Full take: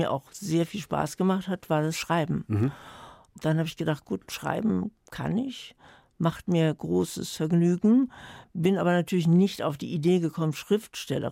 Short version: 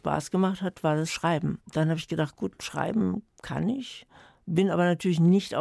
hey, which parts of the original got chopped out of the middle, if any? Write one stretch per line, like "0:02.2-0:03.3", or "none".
0:02.5-0:03.3
0:06.1-0:08.5